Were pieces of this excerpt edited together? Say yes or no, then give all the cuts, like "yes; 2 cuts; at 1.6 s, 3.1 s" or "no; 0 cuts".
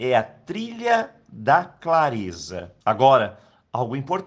yes; 1 cut; at 2.8 s